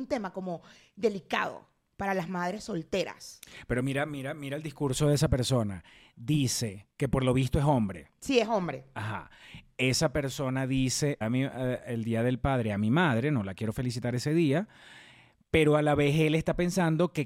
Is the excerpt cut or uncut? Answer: cut